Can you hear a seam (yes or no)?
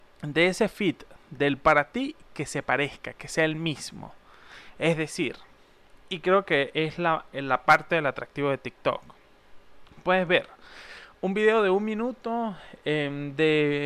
no